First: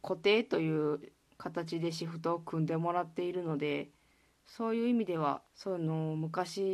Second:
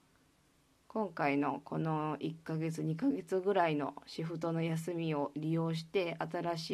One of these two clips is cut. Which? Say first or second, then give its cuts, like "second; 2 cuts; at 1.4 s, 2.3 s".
first; 1 cut; at 5.5 s